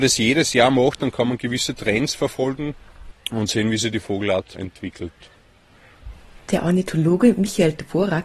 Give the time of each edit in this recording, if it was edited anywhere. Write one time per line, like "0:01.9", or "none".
0:04.5